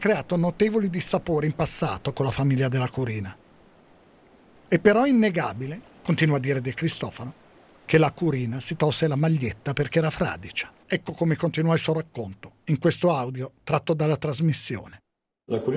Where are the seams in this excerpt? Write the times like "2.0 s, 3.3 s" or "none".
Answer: 4.6 s, 10.8 s

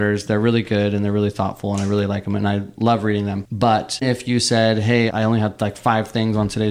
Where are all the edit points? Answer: 4.0 s, 5.1 s

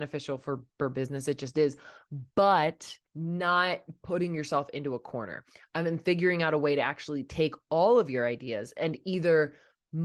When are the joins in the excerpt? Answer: 3.1 s

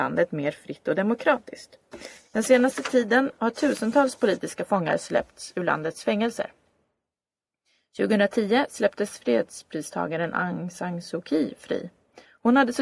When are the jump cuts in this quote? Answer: none

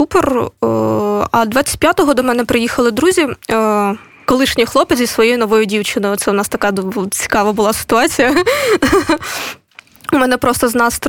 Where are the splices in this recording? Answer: none

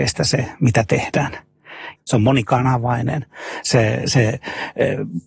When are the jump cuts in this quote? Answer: 2.0 s

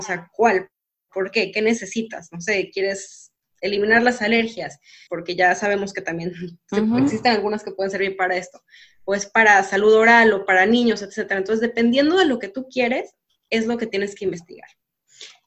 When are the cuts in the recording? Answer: 5.1 s

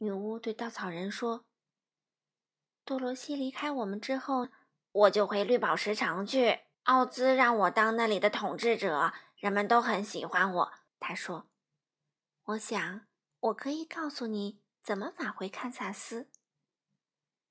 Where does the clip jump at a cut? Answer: 4.4 s, 6.7 s, 10.9 s

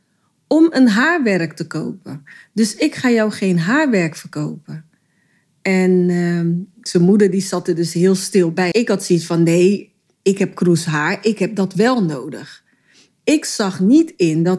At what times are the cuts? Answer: 8.7 s

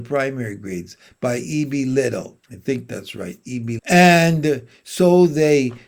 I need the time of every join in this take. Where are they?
2.4 s, 3.8 s

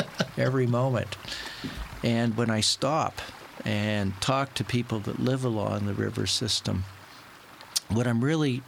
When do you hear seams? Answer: none

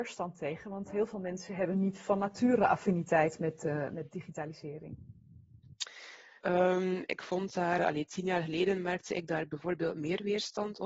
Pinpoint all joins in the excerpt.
6.4 s, 7.8 s

